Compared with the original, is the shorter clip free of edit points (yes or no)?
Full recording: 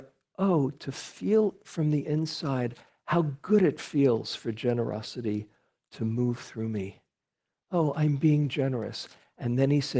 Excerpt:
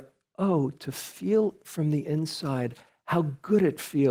yes